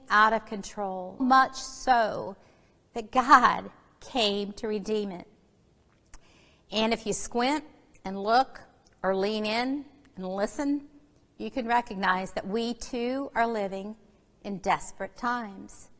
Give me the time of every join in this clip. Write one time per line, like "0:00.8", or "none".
0:01.2